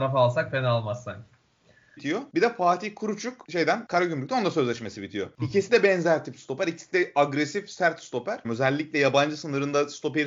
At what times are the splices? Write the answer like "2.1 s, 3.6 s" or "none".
2.0 s, 8.4 s